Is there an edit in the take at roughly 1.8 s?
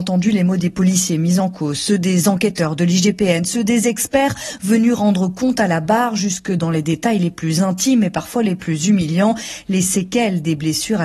no; 0 cuts

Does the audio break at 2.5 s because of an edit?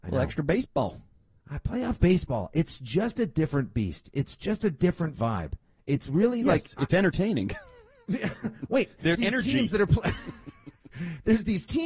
no; 1 cut; at 9.1 s

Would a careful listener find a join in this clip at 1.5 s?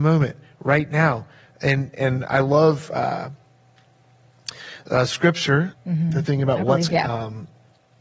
no; 2 cuts; at 5.7 s, 6.9 s

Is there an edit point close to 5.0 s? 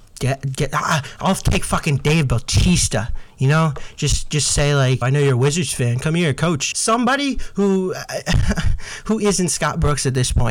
yes; 2 cuts; at 5.0 s, 6.7 s

